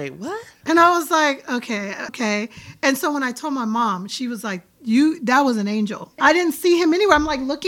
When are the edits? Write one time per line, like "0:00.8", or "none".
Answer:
0:02.1
0:06.2